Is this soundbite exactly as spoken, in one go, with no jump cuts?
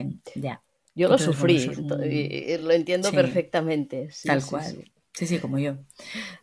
yes; 0 cuts

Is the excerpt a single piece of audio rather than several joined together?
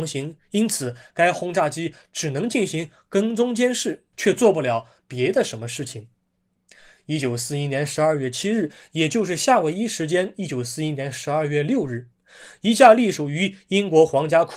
yes; 0 cuts

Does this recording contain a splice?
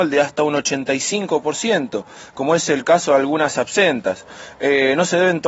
no; 0 cuts

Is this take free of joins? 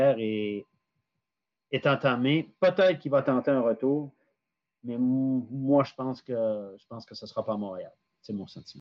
yes; 0 cuts

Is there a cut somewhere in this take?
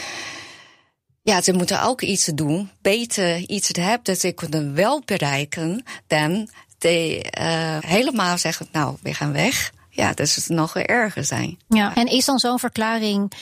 yes; 2 cuts; at 7.8 s, 11.9 s

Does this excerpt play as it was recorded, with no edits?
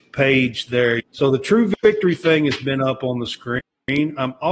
no; 1 cut; at 1.0 s

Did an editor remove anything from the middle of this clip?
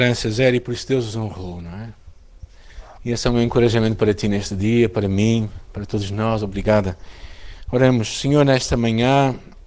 yes; 1 cut; at 3.0 s

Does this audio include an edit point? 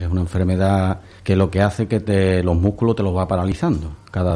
no; 0 cuts

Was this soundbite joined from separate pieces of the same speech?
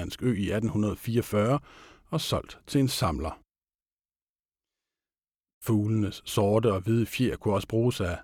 yes; 1 cut; at 5.5 s

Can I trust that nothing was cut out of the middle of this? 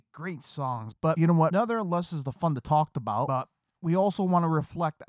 no; 1 cut; at 0.9 s

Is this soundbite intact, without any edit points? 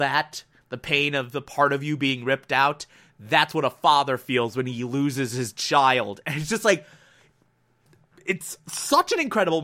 yes; 0 cuts

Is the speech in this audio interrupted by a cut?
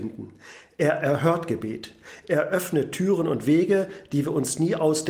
no; 0 cuts

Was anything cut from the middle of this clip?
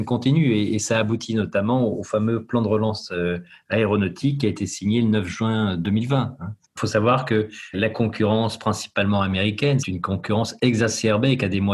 yes; 3 cuts; at 6.6 s, 7.7 s, 9.8 s

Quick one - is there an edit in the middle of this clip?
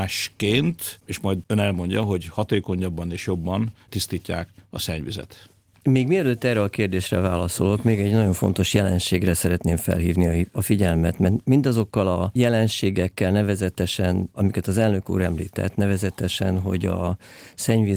no; 0 cuts

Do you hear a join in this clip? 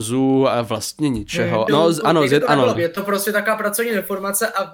yes; 2 cuts; at 1.7 s, 2.7 s

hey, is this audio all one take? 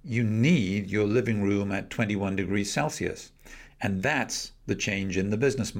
yes; 0 cuts

